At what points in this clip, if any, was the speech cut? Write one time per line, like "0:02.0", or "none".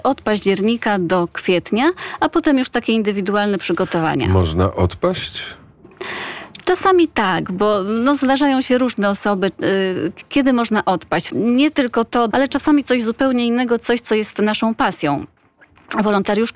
0:11.3
0:12.3